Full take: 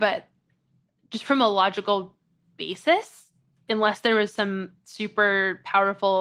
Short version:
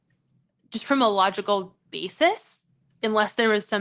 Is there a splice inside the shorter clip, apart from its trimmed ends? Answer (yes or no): yes